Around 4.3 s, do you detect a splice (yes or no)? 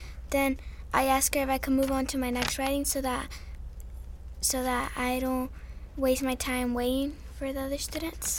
no